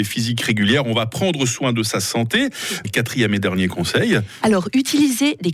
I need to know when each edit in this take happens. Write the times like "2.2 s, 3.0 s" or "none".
2.8 s